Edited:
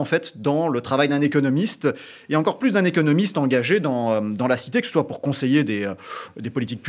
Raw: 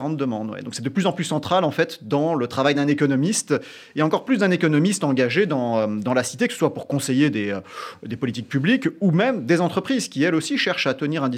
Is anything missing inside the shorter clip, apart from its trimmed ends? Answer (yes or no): no